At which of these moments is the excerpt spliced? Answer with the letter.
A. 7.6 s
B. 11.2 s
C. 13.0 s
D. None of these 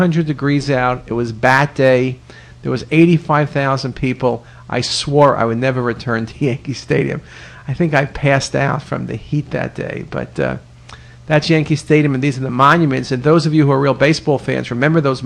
D